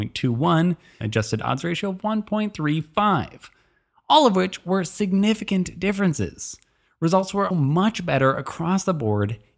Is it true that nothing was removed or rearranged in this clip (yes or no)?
no